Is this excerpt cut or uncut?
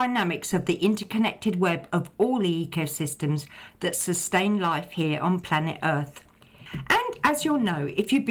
cut